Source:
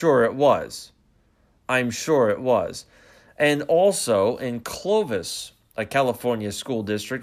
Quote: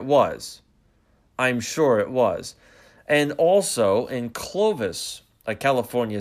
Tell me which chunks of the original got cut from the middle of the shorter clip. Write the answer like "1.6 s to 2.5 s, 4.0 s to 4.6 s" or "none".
none